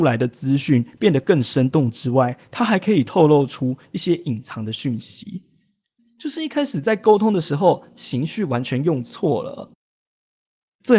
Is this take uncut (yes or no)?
no